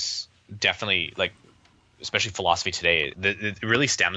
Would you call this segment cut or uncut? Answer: cut